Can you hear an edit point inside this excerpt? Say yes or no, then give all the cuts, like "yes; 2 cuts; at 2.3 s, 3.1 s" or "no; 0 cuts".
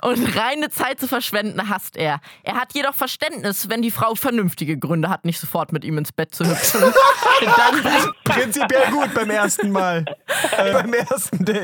yes; 2 cuts; at 4.1 s, 10.7 s